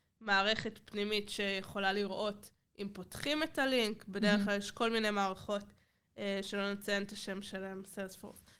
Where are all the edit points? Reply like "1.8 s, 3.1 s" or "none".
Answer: none